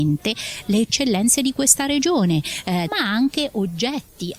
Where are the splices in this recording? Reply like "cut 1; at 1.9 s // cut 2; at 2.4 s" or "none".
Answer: cut 1; at 2.9 s